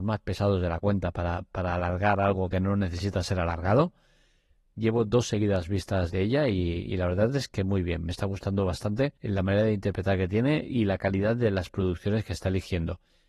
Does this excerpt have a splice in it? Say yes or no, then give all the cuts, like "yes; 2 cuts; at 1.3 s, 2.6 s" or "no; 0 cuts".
yes; 3 cuts; at 4.6 s, 6.1 s, 9.2 s